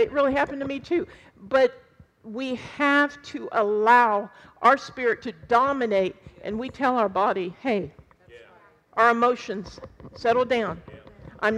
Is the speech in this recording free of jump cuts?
no; 1 cut; at 8.4 s

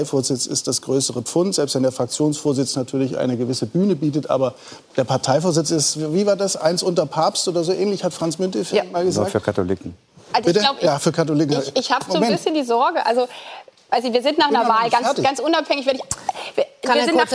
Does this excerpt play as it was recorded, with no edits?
yes; 0 cuts

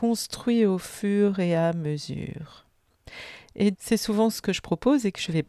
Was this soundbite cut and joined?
yes; 1 cut; at 3.7 s

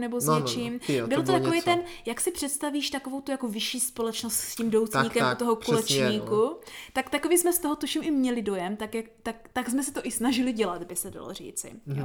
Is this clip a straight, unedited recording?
yes; 0 cuts

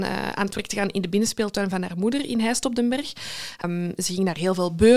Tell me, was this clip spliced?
yes; 1 cut; at 3.6 s

